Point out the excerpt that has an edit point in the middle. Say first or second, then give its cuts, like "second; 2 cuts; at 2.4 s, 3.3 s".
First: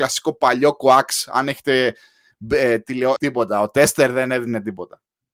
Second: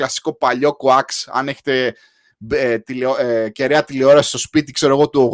first; 1 cut; at 3.2 s